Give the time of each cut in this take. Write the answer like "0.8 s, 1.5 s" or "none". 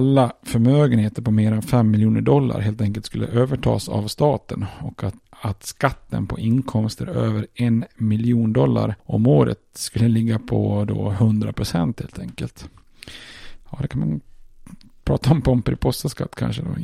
5.2 s

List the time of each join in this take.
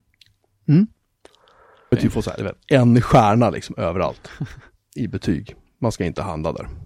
1.9 s

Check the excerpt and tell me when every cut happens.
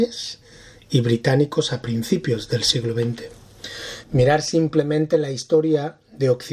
4.0 s

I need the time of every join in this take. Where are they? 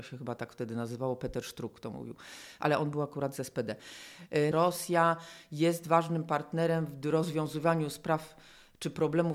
4.5 s

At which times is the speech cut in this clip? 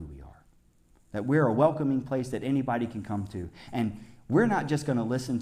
none

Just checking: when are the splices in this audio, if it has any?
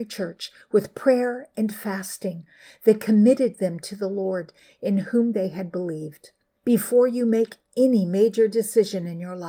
6.5 s

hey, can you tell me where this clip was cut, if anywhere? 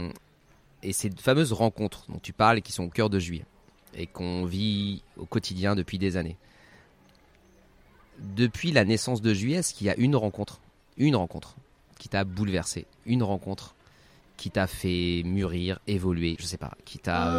12.9 s, 16.4 s

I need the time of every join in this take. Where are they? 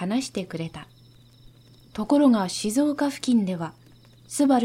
1.9 s

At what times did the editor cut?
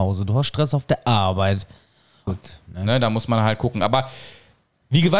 2.3 s

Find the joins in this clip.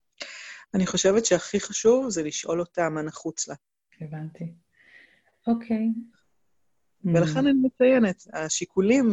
3.9 s, 6.1 s

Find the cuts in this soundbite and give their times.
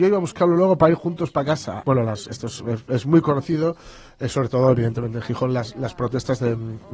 1.8 s

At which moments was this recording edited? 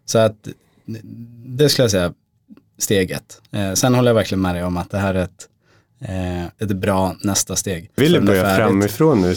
6.6 s, 8.0 s

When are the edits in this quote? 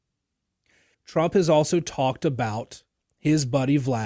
0.9 s

